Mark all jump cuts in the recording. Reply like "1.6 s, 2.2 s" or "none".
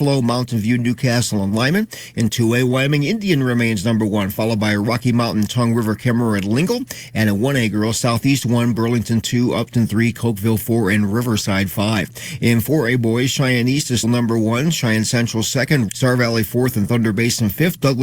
14.0 s, 15.9 s